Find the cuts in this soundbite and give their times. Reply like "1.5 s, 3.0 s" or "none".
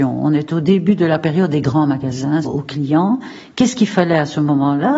2.4 s